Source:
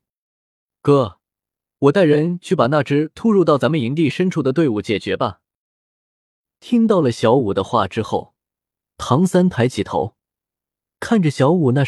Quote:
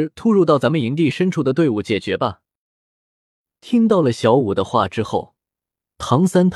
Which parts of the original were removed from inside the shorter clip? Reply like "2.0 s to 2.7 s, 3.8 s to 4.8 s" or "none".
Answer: none